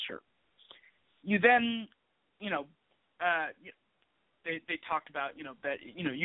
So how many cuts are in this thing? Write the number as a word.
zero